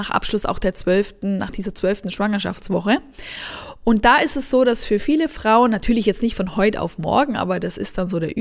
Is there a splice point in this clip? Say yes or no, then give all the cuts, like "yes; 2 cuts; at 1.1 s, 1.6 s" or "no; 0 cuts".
no; 0 cuts